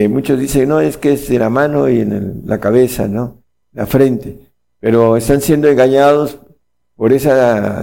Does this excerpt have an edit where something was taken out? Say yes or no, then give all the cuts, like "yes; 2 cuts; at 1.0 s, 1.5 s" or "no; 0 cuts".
no; 0 cuts